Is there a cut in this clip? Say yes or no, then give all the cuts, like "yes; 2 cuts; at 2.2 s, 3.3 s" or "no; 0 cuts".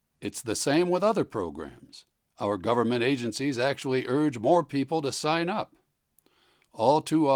no; 0 cuts